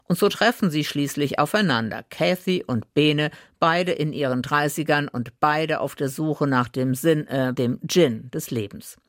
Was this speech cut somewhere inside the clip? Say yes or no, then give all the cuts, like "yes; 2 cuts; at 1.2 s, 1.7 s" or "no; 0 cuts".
yes; 1 cut; at 7.6 s